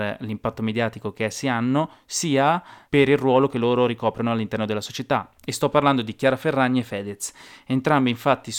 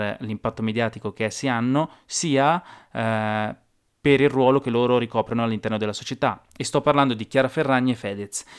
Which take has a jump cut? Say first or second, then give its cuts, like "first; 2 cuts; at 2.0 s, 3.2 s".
first; 1 cut; at 2.9 s